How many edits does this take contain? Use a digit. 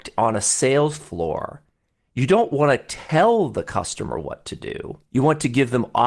1